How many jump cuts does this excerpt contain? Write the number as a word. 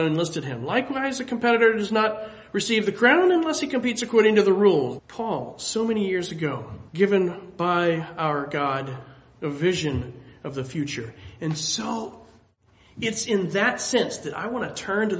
two